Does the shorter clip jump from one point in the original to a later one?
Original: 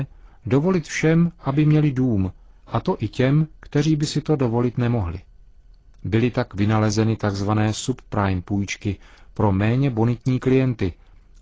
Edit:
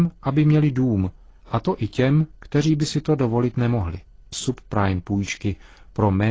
yes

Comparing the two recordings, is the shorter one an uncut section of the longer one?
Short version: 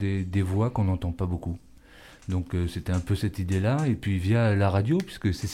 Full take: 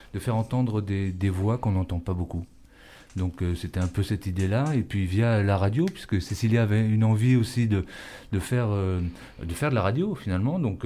yes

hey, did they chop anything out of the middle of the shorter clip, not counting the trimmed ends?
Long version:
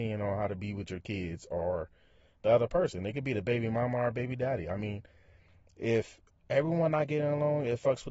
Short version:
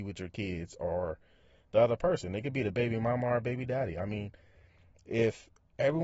no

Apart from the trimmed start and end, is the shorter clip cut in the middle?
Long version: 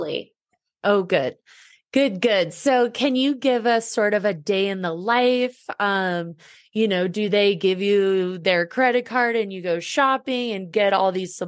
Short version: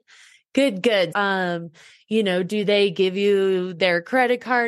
yes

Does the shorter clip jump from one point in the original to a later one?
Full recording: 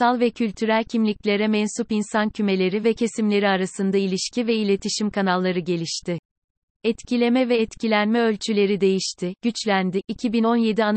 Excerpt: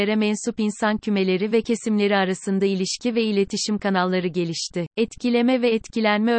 yes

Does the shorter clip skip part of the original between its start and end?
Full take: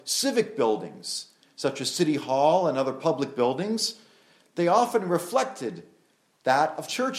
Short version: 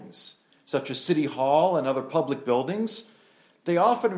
no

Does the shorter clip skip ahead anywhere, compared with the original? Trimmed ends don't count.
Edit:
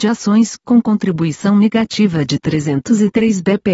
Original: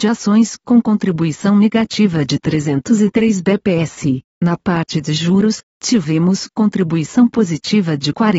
no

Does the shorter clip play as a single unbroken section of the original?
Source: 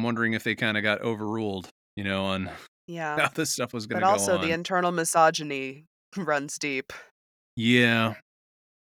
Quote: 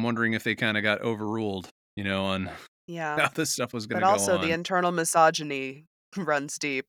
yes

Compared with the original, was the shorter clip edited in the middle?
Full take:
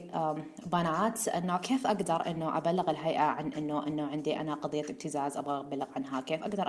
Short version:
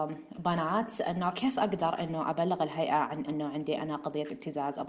yes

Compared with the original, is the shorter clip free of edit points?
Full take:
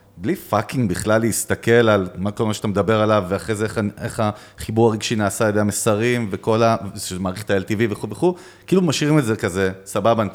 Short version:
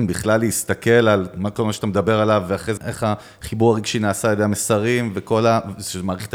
no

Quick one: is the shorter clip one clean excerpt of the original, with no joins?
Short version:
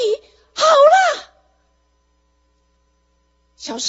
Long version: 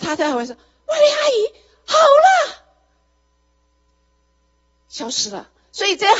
yes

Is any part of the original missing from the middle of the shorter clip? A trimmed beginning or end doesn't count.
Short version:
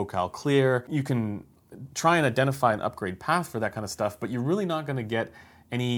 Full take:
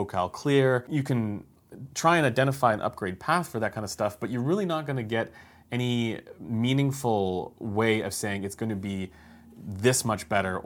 no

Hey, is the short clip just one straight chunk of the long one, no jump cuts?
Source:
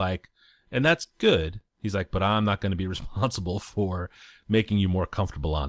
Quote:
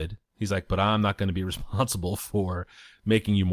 yes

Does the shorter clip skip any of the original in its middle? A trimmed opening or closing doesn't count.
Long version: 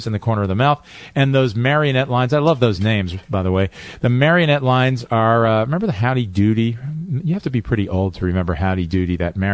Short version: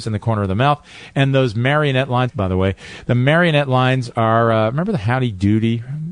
yes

